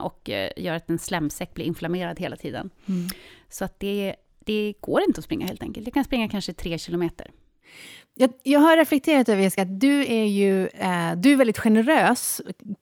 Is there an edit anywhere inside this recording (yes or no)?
no